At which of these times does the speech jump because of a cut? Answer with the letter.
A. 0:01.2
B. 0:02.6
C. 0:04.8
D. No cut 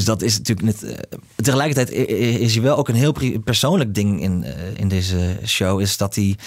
C